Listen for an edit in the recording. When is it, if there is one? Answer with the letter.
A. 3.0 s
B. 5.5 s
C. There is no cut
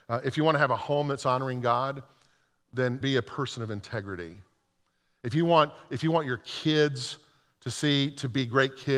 A